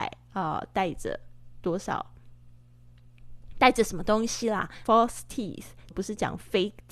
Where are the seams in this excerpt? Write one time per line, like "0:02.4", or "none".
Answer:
0:04.8
0:05.9